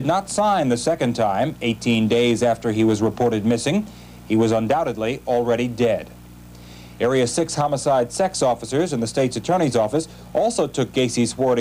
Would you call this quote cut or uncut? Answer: uncut